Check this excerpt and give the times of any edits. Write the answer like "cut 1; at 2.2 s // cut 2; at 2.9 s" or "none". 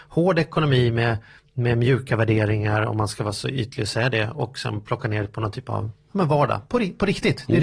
none